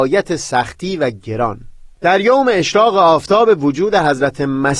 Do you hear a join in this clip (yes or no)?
yes